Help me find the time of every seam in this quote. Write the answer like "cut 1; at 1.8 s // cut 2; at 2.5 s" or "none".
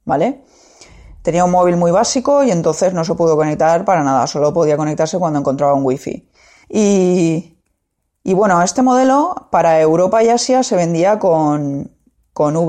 cut 1; at 6.6 s